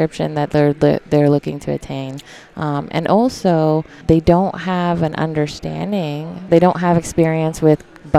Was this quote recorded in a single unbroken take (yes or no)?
no